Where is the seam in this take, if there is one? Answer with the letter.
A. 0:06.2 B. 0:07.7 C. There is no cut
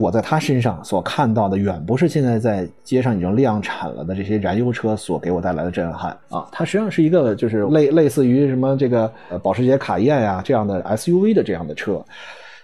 A